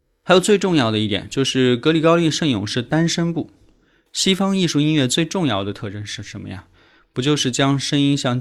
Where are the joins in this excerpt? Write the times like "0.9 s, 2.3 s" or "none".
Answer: none